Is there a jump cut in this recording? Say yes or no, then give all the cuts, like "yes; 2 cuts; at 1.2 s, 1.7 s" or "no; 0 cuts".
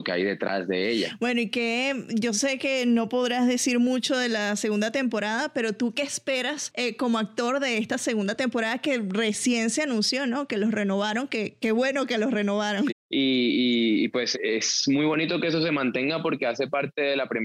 yes; 2 cuts; at 12.9 s, 14.3 s